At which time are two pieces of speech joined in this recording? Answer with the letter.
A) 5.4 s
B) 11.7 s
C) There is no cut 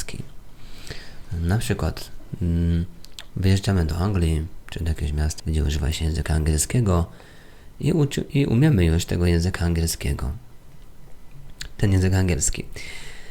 A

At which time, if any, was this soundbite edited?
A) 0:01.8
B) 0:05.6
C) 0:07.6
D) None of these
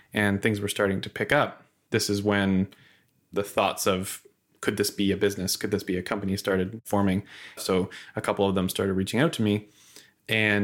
C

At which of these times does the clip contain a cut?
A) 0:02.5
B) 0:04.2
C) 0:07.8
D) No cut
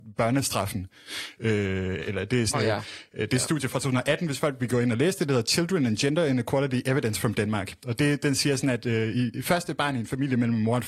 A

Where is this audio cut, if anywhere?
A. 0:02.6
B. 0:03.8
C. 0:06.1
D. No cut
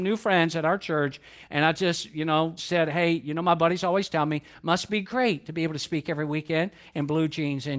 A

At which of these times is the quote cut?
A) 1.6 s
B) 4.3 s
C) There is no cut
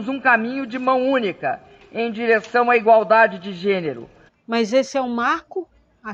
B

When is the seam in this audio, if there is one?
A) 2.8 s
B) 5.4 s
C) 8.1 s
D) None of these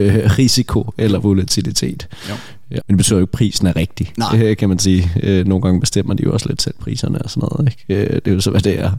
A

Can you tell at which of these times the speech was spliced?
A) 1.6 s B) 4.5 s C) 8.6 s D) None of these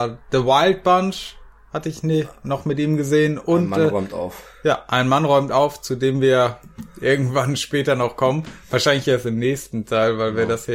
D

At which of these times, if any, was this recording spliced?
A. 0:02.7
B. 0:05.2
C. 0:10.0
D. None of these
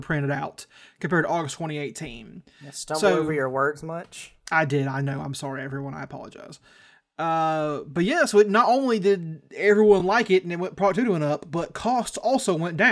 D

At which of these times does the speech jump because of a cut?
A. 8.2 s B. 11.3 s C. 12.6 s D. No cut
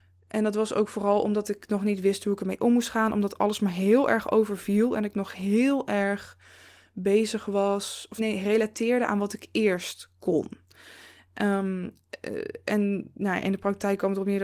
A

